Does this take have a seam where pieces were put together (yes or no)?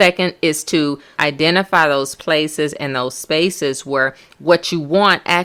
yes